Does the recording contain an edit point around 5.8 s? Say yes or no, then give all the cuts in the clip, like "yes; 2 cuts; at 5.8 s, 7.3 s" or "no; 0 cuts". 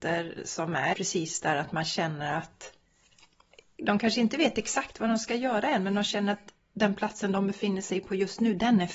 no; 1 cut; at 0.9 s